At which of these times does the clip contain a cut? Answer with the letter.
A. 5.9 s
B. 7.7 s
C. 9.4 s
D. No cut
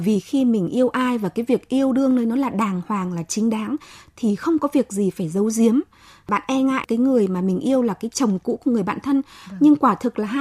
D